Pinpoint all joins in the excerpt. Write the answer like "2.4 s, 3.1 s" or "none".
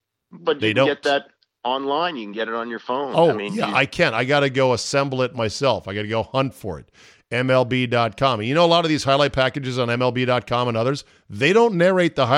none